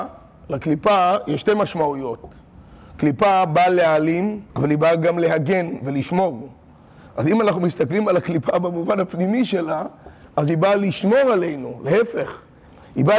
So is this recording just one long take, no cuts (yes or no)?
no